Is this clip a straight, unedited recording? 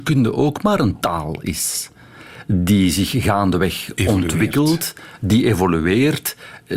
yes; 0 cuts

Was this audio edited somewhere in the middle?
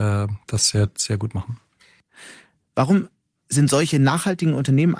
no; 0 cuts

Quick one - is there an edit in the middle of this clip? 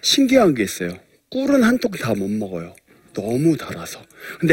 no; 0 cuts

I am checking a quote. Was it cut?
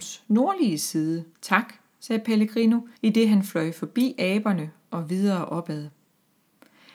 yes; 2 cuts; at 1.4 s, 3.0 s

